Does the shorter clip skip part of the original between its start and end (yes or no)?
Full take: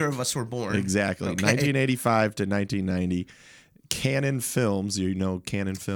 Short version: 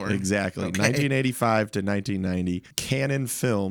yes